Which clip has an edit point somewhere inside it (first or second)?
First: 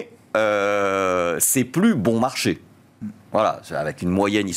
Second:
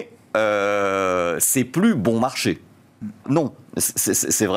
second